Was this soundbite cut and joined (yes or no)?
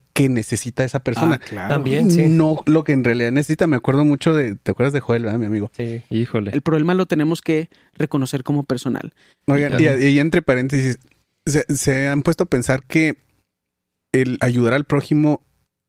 yes